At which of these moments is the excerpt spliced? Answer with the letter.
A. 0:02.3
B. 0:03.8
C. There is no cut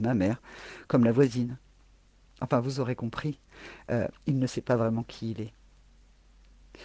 C